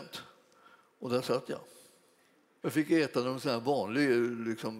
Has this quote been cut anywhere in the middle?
yes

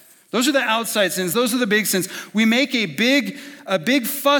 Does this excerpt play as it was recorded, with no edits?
yes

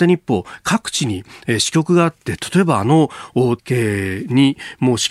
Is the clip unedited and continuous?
no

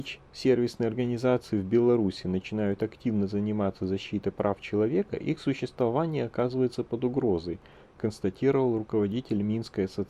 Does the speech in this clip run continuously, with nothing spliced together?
yes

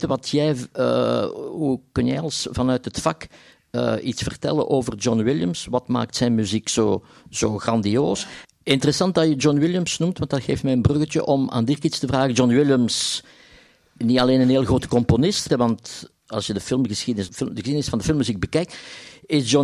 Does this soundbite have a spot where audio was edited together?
yes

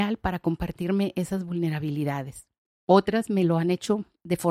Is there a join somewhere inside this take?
no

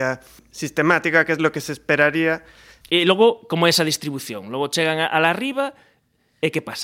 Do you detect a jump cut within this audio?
yes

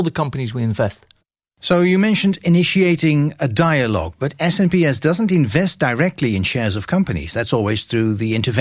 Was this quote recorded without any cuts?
yes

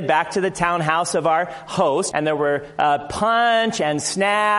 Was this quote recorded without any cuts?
no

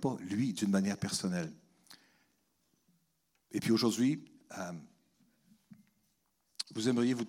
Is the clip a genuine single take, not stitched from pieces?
yes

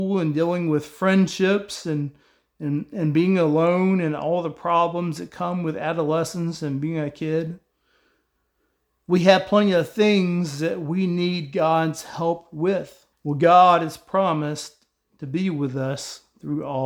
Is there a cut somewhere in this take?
yes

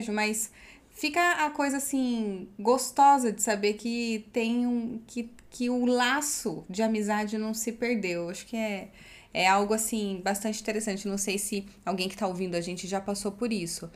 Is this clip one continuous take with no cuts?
yes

